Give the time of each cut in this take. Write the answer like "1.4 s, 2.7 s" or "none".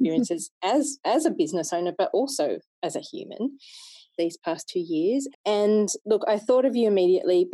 4.2 s, 5.3 s